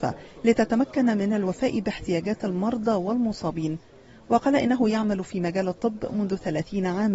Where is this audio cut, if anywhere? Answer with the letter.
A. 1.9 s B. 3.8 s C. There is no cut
C